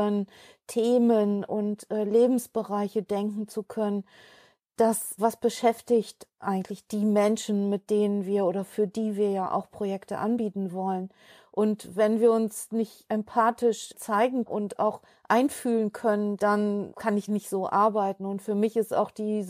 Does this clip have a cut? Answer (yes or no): no